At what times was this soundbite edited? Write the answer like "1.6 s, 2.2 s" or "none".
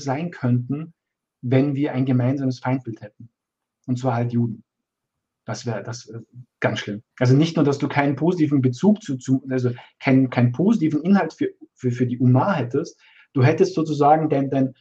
7.1 s